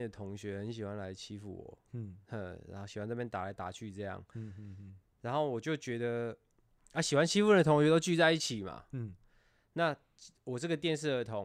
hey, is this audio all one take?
yes; 0 cuts

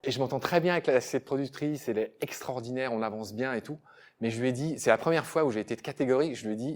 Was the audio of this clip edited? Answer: no; 0 cuts

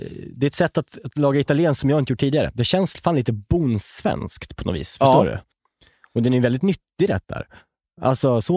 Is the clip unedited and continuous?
no; 1 cut; at 5.5 s

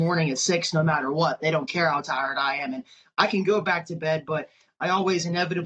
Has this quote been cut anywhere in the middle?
no; 0 cuts

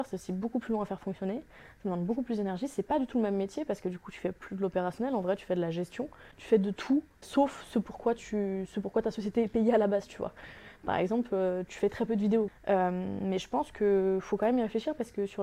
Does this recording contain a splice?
yes; 1 cut; at 12.5 s

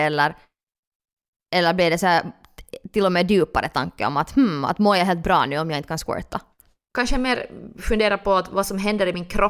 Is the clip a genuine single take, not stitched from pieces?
yes; 0 cuts

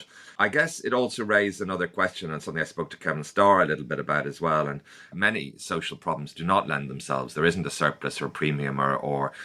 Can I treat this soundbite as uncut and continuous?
yes; 0 cuts

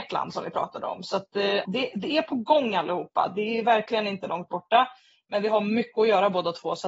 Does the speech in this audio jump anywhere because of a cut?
yes; 1 cut; at 1.6 s

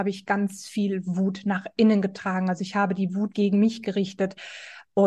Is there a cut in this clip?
yes; 1 cut; at 3.3 s

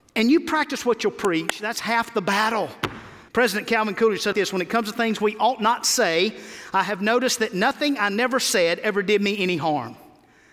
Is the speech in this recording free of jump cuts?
no; 2 cuts; at 3.3 s, 4.3 s

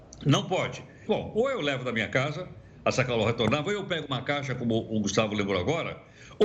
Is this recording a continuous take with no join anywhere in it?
no; 1 cut; at 1.1 s

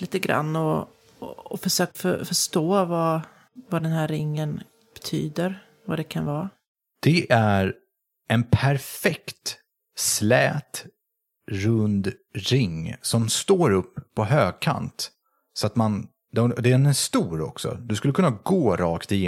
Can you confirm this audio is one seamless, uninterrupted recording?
yes; 0 cuts

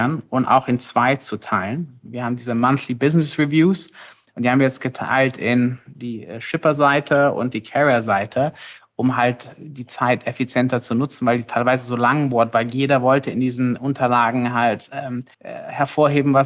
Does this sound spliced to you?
yes; 1 cut; at 15.3 s

